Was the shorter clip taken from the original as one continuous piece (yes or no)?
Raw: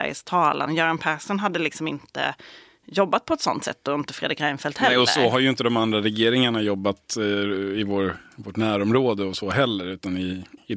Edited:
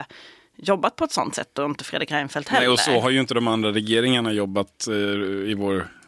yes